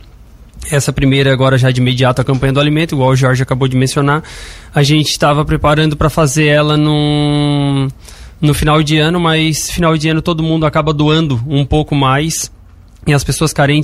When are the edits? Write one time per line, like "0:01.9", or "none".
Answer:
none